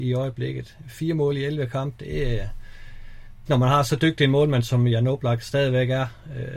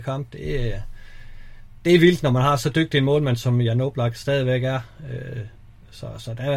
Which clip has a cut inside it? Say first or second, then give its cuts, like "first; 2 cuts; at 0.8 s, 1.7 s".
first; 1 cut; at 3.5 s